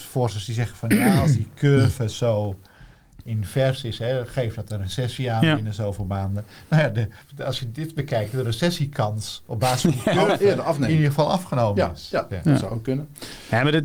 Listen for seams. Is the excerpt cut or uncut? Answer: cut